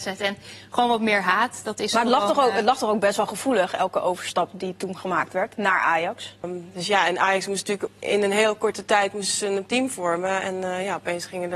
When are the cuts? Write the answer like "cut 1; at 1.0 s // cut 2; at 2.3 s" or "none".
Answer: cut 1; at 6.4 s